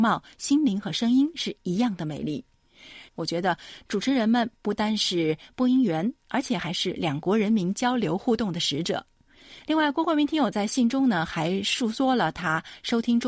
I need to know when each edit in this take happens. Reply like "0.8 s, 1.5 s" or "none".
3.1 s, 9.6 s